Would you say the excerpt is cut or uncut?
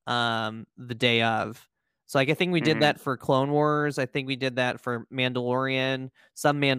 uncut